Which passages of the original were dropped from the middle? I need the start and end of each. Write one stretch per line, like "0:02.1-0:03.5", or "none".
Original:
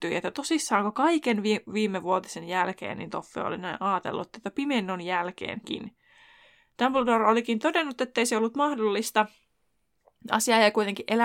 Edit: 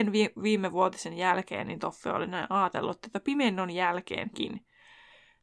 none

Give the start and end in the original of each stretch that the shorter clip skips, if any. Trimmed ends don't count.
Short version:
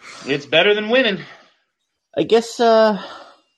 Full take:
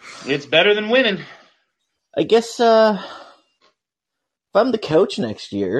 none

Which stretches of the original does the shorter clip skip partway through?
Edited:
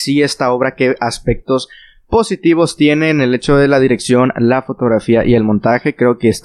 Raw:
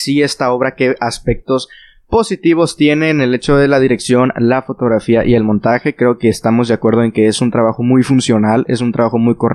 none

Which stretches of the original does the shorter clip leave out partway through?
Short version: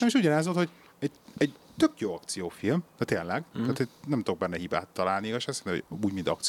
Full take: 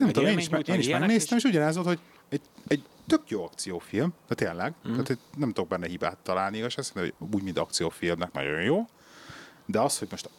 none

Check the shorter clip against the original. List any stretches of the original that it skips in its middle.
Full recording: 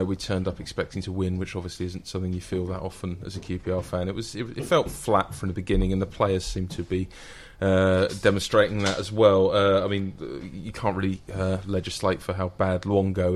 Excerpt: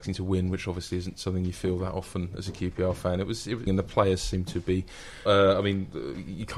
0:04.5-0:05.9
0:07.5-0:09.5

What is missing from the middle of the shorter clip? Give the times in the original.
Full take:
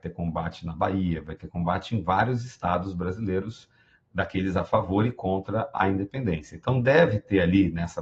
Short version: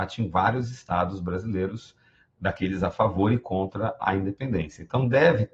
none

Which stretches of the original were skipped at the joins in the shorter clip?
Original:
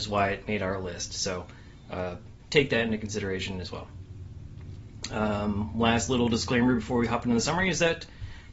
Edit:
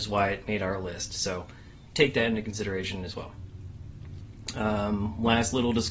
0:01.9-0:02.4

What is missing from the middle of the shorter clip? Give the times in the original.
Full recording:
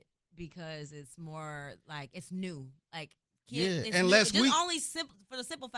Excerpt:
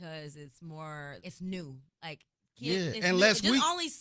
0:01.8-0:02.1

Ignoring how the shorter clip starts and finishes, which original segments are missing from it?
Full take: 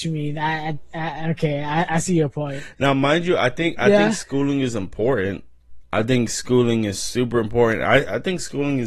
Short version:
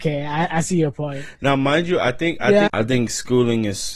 0:04.0-0:05.9

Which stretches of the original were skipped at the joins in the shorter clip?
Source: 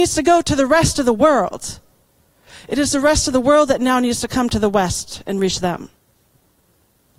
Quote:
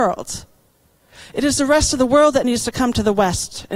0:03.8-0:04.0

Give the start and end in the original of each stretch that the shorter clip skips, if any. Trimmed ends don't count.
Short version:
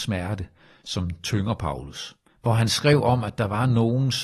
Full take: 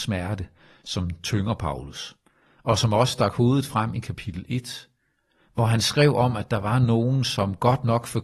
0:02.3-0:05.4

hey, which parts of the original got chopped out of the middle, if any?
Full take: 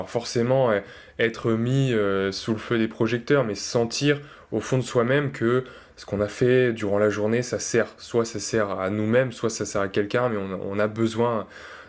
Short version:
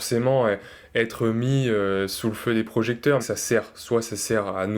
0:03.4-0:07.4

